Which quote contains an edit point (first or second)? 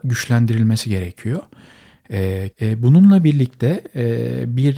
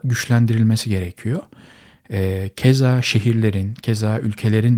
first